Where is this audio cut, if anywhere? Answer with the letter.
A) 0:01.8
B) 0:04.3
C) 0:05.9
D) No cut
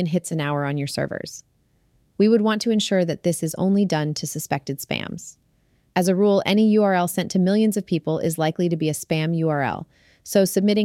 D